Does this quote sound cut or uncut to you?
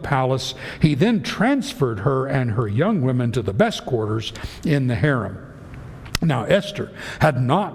uncut